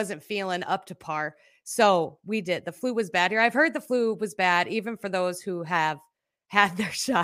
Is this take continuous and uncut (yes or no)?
yes